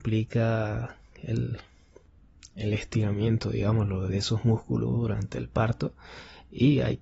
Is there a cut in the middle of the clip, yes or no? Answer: yes